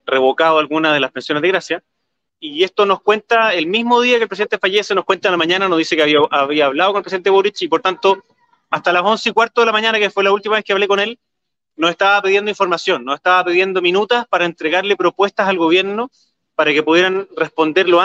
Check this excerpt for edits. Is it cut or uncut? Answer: cut